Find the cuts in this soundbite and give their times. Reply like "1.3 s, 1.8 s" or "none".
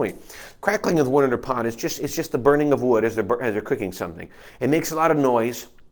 none

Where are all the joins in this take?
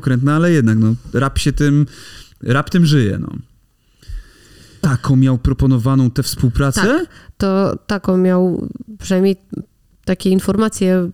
4.8 s

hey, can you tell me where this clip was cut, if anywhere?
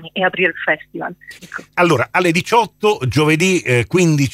1.4 s

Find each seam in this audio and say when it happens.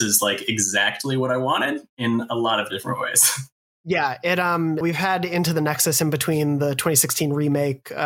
4.8 s

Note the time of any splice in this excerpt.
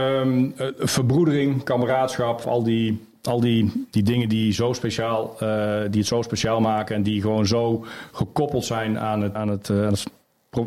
2.4 s, 9.4 s

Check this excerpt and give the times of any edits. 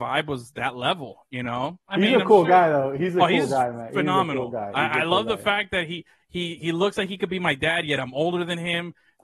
none

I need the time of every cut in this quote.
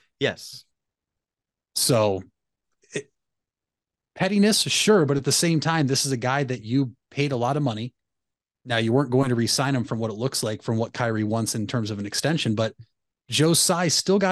none

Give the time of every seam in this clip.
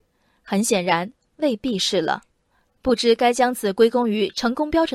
2.6 s

